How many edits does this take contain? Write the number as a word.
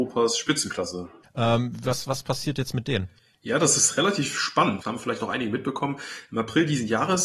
two